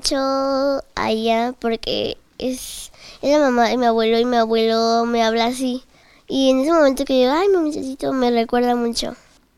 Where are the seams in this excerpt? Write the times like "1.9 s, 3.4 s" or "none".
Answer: none